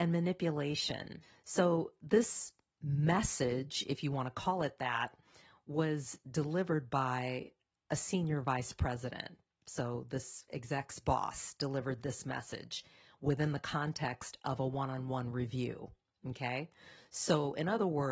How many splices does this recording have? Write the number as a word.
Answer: zero